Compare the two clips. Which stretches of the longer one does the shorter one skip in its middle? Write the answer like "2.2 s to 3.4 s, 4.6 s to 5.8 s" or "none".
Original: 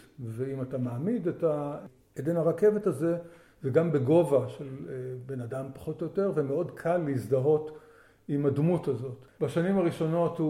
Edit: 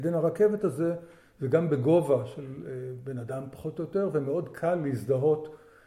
none